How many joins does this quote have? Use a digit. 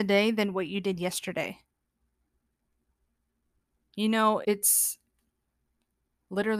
1